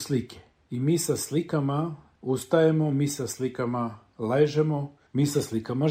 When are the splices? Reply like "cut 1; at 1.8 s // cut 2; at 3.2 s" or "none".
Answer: none